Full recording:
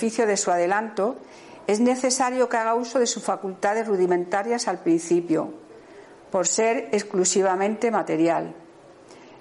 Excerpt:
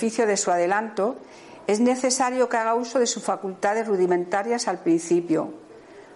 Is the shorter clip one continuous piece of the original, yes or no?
yes